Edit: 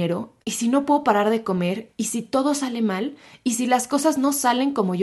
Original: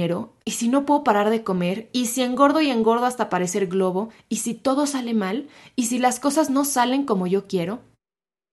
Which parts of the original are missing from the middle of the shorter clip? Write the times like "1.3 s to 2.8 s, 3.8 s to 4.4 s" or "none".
1.9 s to 4.2 s